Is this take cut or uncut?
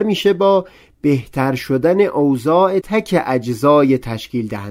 cut